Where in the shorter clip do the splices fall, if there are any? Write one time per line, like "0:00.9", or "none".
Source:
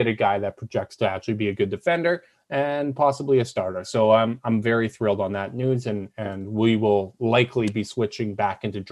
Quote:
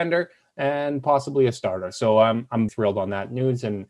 0:02.7